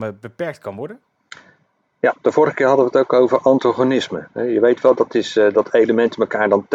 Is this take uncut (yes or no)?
yes